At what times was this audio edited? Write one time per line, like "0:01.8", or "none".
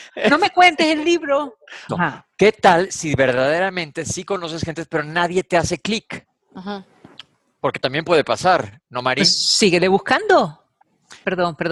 0:01.9